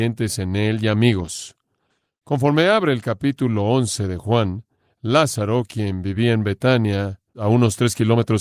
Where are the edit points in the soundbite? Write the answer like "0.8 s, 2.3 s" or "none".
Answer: 7.3 s

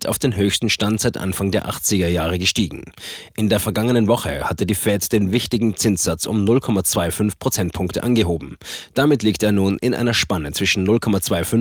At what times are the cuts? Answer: none

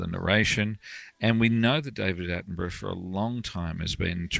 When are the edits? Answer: none

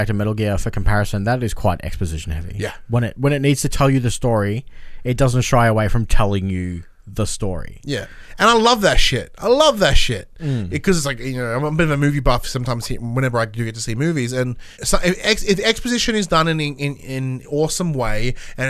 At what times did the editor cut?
14.7 s, 17.4 s

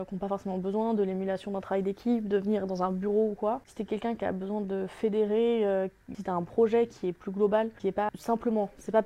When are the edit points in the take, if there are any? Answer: 6.1 s, 8.1 s

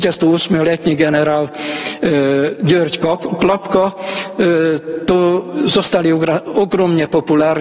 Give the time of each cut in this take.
none

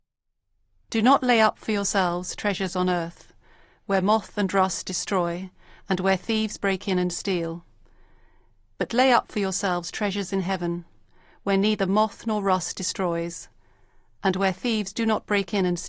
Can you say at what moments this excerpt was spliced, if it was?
none

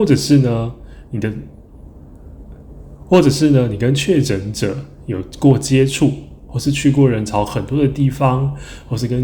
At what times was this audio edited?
none

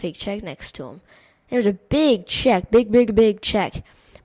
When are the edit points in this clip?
3.1 s

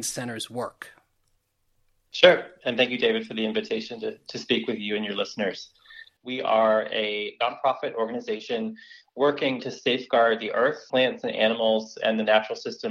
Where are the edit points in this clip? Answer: 6.2 s, 9.6 s, 10.9 s

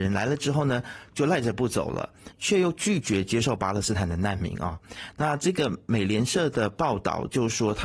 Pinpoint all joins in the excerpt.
2.3 s

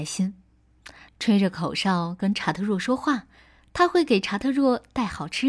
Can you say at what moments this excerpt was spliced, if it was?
1.1 s

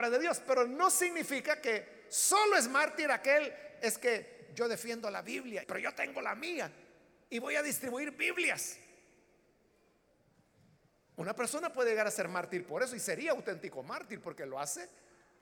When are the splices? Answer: 5.6 s

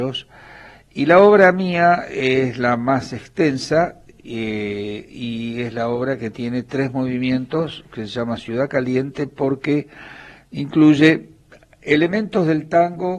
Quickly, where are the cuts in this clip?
none

